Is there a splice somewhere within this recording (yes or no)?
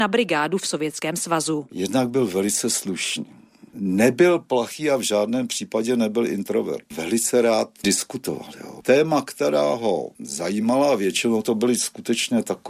yes